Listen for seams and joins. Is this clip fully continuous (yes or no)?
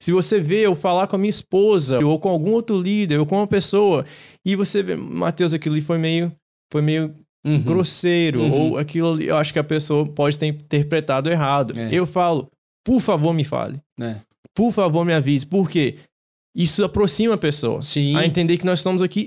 no